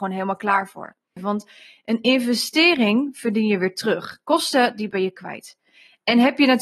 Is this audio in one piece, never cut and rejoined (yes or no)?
no